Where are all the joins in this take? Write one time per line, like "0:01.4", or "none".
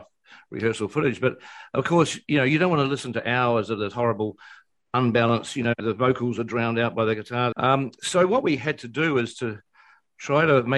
0:07.5